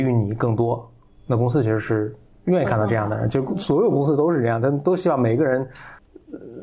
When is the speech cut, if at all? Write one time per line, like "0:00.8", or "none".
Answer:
none